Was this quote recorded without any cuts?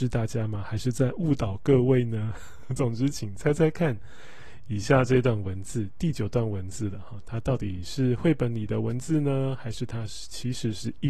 yes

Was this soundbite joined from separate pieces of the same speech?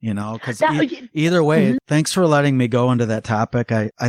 yes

